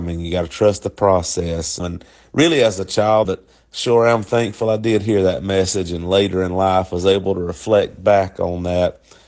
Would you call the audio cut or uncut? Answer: cut